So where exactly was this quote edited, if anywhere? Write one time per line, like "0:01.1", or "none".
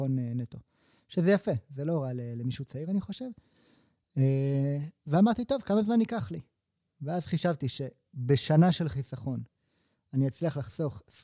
none